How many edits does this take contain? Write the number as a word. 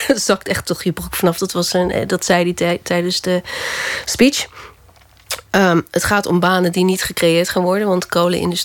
zero